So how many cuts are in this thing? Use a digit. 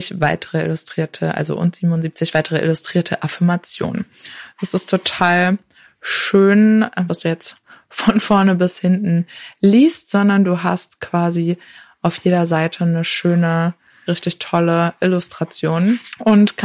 2